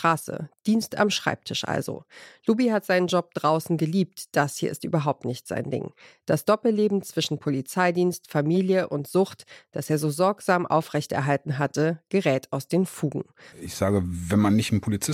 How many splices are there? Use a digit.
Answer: 1